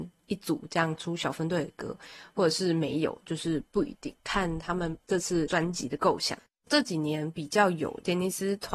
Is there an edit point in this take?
yes; 1 cut; at 6.6 s

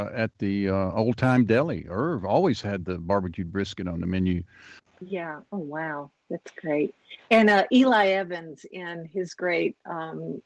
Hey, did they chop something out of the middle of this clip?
yes; 1 cut; at 4.8 s

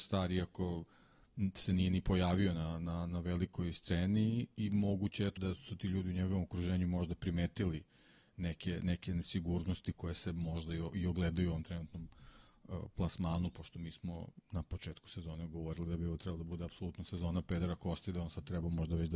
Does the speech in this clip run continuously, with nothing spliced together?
no; 1 cut; at 5.4 s

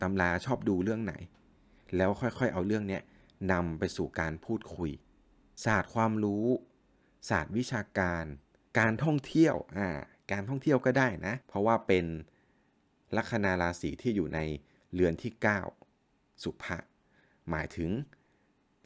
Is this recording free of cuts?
no; 1 cut; at 11.4 s

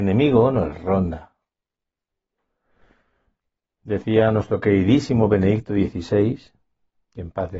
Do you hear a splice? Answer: no; 0 cuts

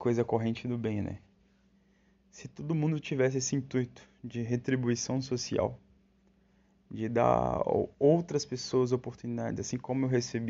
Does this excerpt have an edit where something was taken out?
no; 0 cuts

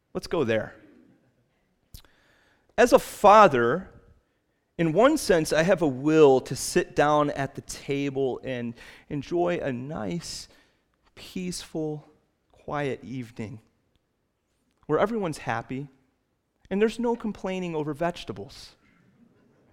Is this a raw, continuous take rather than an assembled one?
yes; 0 cuts

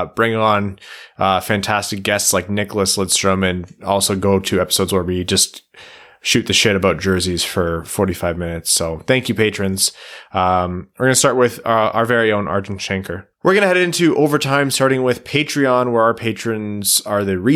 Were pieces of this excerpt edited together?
yes; 1 cut; at 13.3 s

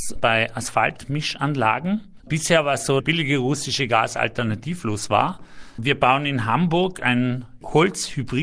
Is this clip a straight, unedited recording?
no; 2 cuts; at 3.0 s, 5.8 s

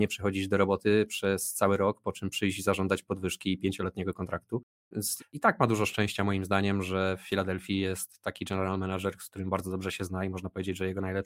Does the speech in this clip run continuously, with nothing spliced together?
no; 1 cut; at 5.2 s

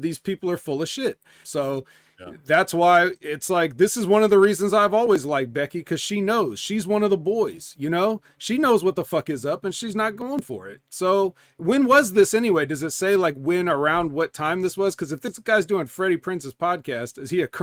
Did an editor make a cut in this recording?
yes; 1 cut; at 1.4 s

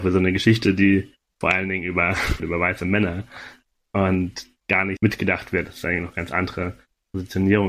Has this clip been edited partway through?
yes; 2 cuts; at 2.4 s, 5.0 s

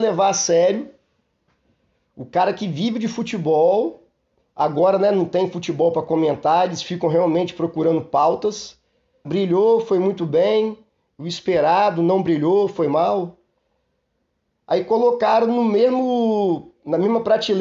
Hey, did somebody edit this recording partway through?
yes; 1 cut; at 9.2 s

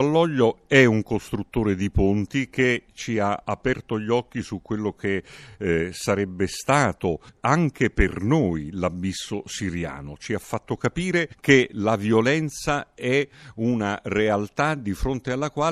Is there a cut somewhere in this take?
no; 0 cuts

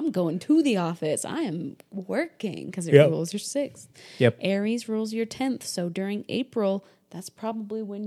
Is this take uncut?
yes; 0 cuts

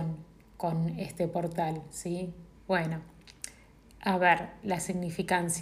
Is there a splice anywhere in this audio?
yes; 2 cuts; at 2.5 s, 4.6 s

